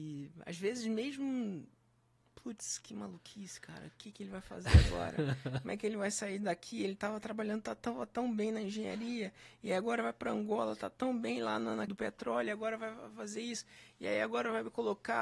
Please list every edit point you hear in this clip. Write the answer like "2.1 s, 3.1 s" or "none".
11.9 s